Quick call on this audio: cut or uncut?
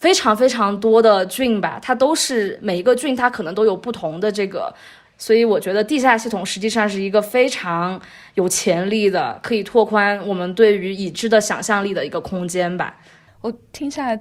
cut